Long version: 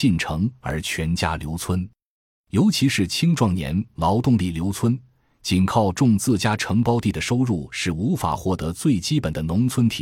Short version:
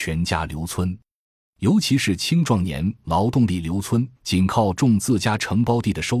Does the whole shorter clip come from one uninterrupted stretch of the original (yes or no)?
no